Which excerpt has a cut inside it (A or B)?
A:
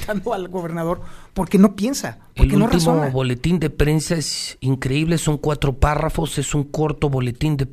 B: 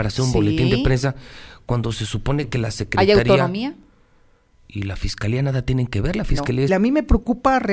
B